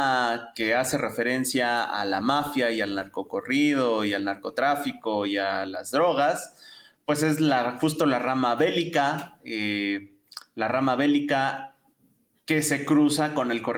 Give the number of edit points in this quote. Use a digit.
0